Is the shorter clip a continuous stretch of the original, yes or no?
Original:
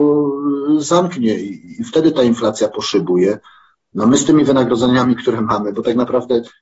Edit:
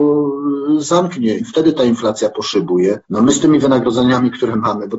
no